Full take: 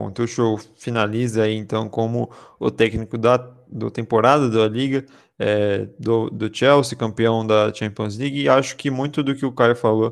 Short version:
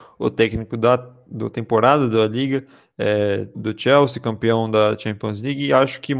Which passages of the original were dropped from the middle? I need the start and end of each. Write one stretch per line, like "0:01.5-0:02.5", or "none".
0:06.0-0:06.3